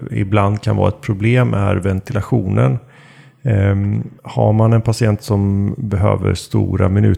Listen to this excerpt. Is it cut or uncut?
cut